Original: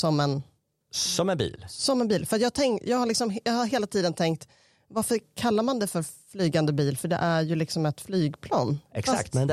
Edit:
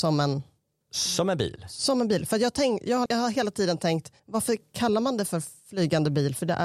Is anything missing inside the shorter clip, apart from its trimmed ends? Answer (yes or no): yes